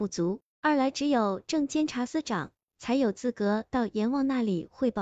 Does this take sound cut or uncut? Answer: cut